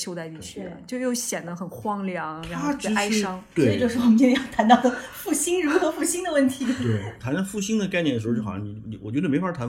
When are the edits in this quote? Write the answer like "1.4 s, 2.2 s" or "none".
none

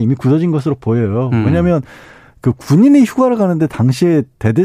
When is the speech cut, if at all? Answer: none

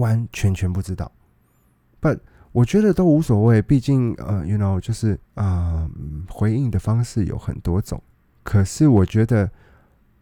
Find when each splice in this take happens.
5.2 s

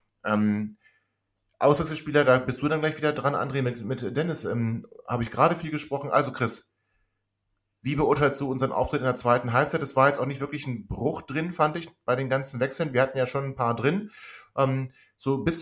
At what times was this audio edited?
none

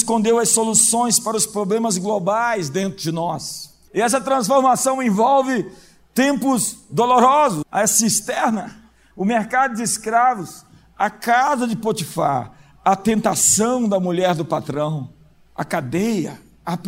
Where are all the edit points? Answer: 3.9 s, 7.6 s, 9.1 s

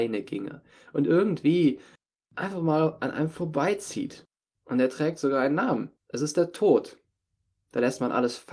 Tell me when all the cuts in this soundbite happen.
4.6 s, 6.0 s

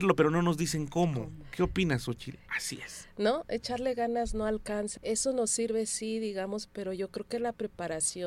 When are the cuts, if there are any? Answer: 2.5 s, 5.0 s, 6.7 s

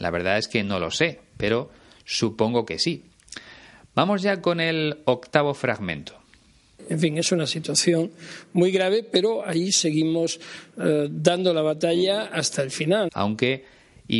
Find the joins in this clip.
13.1 s

